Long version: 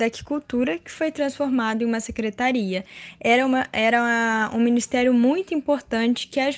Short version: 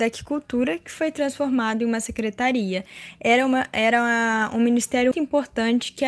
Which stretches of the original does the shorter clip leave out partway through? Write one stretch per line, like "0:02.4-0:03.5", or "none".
0:05.1-0:05.5